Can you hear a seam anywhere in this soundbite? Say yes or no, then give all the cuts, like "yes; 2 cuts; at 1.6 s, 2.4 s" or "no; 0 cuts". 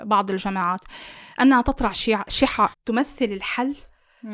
yes; 1 cut; at 2.7 s